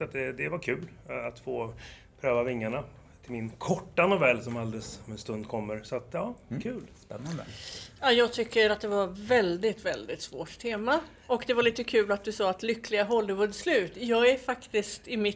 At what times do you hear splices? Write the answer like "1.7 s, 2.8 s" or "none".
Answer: none

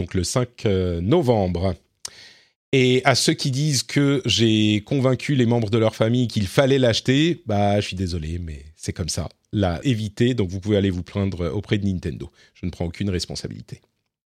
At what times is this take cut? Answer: 9.8 s

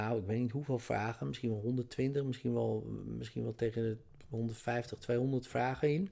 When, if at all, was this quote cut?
none

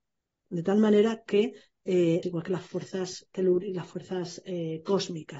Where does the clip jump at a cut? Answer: 2.2 s

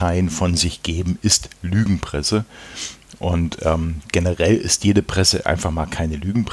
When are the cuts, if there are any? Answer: none

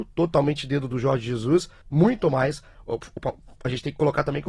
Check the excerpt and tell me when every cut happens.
1.8 s

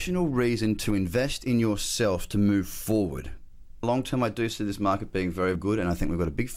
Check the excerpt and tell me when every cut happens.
3.8 s, 5.6 s

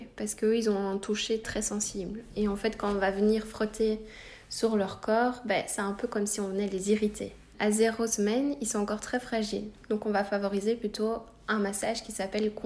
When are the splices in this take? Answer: 1.4 s, 7.5 s

